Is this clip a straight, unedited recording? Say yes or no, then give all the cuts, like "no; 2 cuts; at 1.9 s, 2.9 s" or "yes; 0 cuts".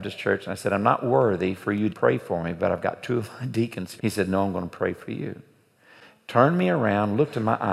no; 2 cuts; at 1.9 s, 4.0 s